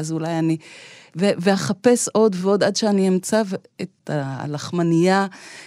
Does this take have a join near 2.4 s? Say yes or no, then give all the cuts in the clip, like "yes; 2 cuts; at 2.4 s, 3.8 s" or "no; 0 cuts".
yes; 2 cuts; at 1.1 s, 2.4 s